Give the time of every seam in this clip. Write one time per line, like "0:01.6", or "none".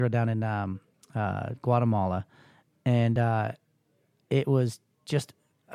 none

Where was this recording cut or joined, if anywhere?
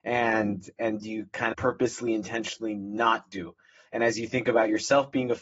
0:01.5

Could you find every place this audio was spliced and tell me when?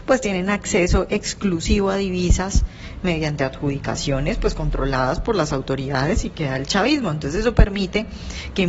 none

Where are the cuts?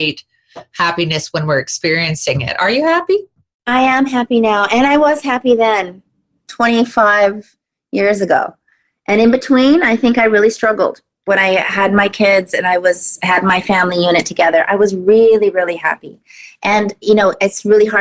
none

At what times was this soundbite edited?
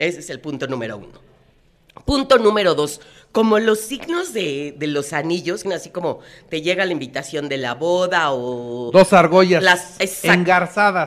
0:05.6

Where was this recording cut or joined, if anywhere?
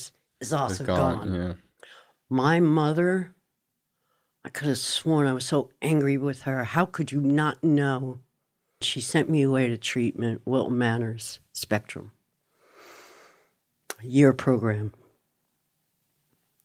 0:08.8

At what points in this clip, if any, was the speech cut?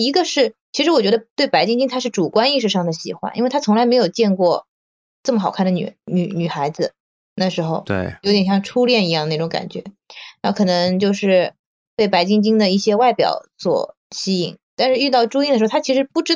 0:14.0

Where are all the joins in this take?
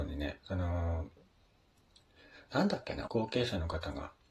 0:03.1

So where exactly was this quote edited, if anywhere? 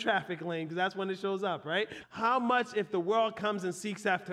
0:02.0

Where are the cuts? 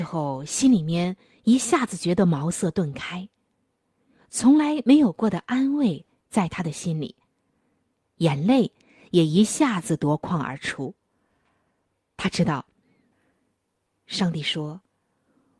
0:13.9

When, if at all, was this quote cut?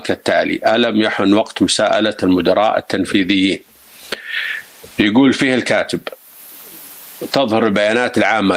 0:04.9

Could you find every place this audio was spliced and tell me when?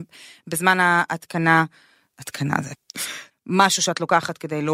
0:03.3

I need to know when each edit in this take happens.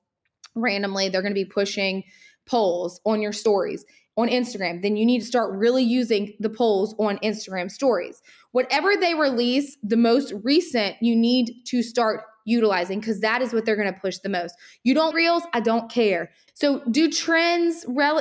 0:15.1
0:16.5

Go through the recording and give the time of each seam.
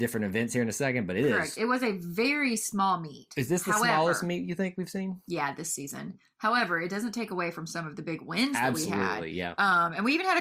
none

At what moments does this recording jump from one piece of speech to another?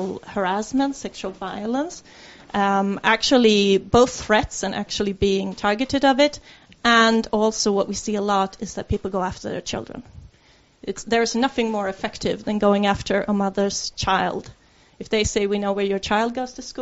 none

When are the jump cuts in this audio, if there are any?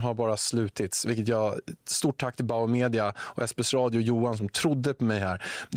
none

